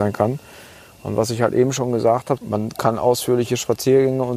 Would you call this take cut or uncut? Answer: cut